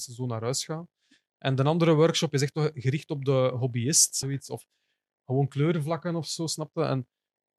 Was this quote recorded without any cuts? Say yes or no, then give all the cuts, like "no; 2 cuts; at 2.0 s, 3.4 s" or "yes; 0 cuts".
no; 1 cut; at 4.2 s